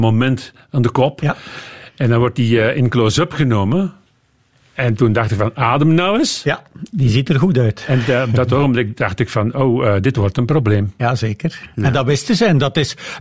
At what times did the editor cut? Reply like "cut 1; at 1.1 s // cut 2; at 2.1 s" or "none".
none